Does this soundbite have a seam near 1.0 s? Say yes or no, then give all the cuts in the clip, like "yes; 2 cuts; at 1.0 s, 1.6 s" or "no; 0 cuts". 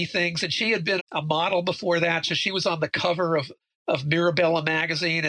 yes; 1 cut; at 1.0 s